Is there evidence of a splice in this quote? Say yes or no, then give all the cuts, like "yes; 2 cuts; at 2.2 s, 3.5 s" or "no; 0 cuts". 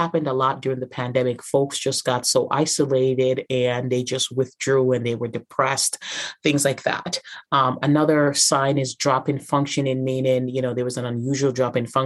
no; 0 cuts